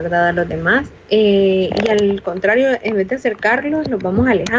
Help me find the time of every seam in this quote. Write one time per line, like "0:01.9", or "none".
0:01.0